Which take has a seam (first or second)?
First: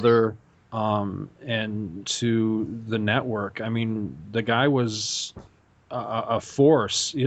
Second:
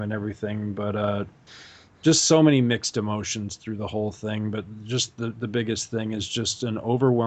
first